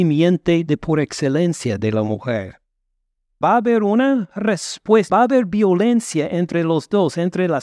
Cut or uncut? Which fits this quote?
cut